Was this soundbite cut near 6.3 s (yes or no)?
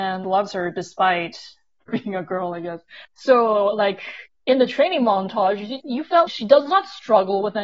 yes